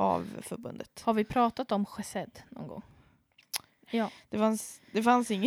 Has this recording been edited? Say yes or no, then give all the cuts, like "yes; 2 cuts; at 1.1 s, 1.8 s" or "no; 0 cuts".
yes; 1 cut; at 3.8 s